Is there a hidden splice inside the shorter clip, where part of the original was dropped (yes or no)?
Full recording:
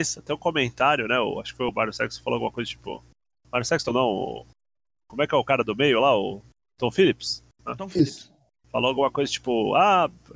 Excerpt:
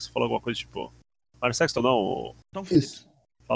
yes